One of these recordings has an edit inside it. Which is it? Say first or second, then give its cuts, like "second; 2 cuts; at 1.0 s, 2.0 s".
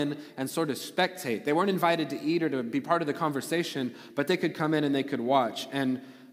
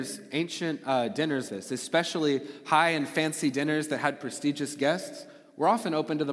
second; 1 cut; at 1.5 s